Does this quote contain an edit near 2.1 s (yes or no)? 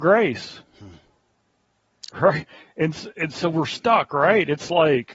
yes